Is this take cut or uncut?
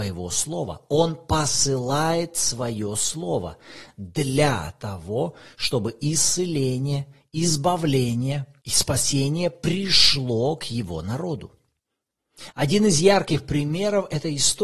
uncut